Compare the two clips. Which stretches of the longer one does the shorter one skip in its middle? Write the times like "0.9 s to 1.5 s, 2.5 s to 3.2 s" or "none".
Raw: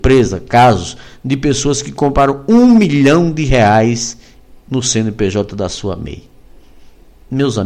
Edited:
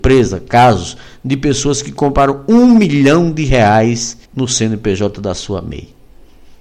4.2 s to 4.6 s